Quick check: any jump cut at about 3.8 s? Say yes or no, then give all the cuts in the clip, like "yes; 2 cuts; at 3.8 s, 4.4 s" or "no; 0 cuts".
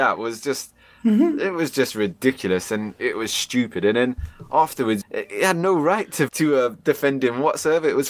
no; 2 cuts; at 5.0 s, 6.3 s